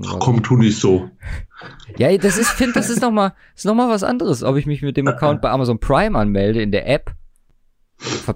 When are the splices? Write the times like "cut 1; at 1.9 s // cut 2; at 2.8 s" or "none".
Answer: none